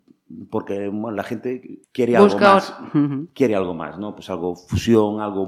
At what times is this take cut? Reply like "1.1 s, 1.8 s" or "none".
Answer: 1.8 s